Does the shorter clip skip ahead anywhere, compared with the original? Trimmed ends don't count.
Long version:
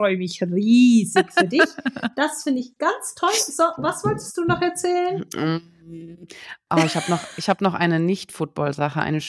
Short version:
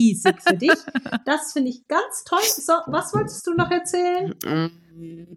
no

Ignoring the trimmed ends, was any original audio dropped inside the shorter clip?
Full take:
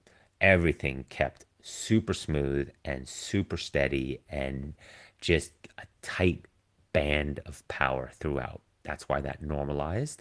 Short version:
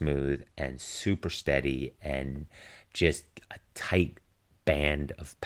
no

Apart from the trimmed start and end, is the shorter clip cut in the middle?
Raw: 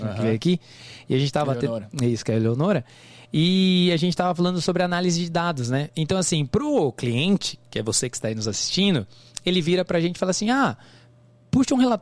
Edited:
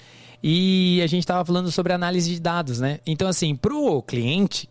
no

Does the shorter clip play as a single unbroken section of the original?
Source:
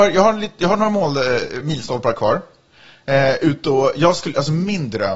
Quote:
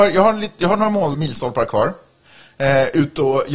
no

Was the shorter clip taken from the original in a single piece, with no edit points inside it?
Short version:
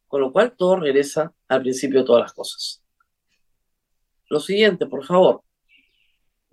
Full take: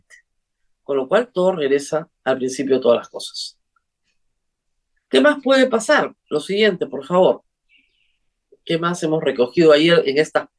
no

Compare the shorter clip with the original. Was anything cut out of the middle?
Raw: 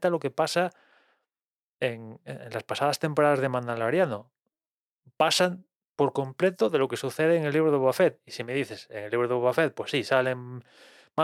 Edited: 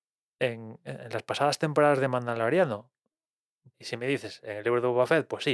yes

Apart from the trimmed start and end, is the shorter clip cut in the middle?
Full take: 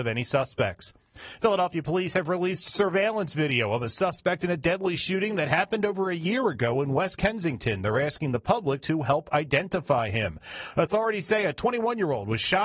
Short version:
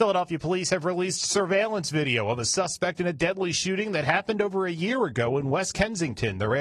no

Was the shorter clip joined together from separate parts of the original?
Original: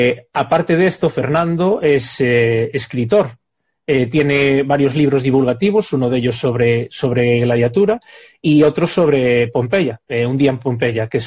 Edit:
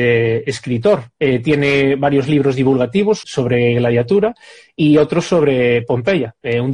yes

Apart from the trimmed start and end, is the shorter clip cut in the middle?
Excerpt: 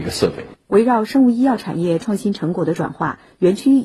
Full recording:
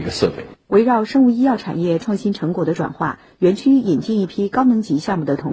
no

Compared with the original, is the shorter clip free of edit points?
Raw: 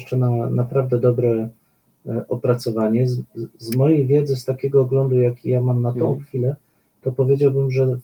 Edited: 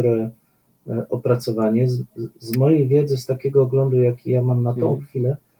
yes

